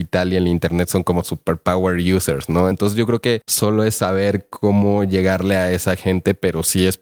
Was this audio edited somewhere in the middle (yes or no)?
yes